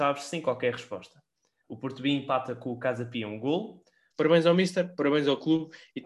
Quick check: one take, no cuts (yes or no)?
no